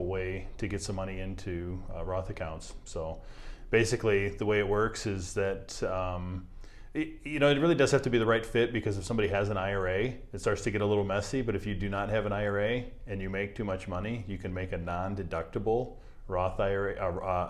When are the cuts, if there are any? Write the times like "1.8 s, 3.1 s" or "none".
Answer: none